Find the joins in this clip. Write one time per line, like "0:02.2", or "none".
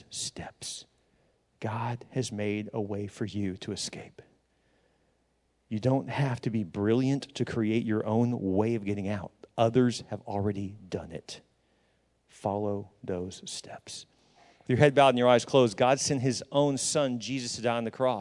none